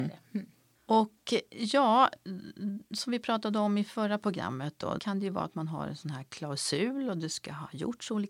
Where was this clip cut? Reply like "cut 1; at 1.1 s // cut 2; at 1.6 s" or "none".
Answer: cut 1; at 5.0 s